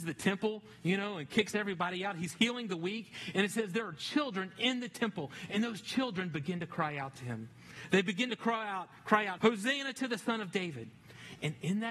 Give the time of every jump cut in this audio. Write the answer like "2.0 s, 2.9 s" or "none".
9.4 s